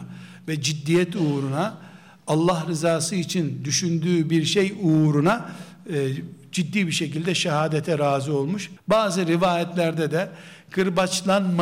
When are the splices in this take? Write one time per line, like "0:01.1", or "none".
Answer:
0:08.8